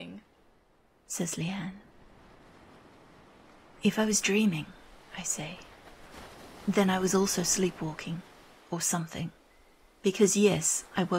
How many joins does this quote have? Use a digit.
0